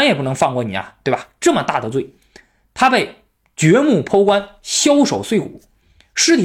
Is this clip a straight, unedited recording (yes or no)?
yes